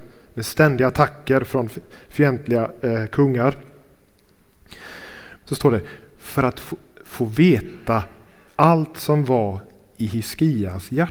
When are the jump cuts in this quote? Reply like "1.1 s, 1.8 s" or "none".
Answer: 5.4 s

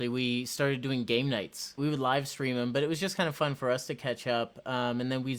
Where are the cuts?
1.8 s

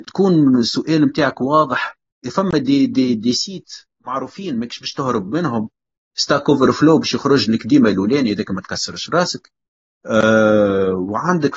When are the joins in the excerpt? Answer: 2.2 s

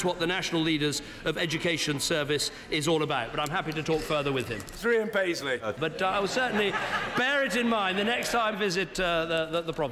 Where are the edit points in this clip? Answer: 5.8 s, 8.5 s

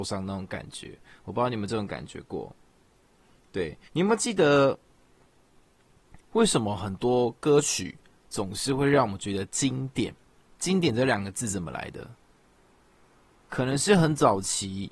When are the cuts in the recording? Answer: 3.9 s

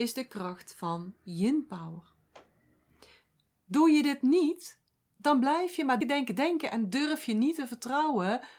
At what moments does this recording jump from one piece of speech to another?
6.0 s

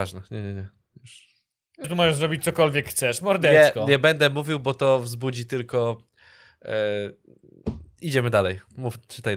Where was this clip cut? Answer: 1.8 s

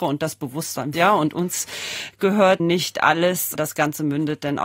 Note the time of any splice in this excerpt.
0.9 s, 2.6 s

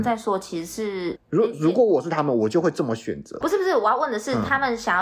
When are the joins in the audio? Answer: 1.2 s, 3.4 s

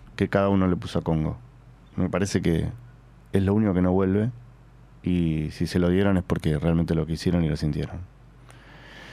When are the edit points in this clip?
none

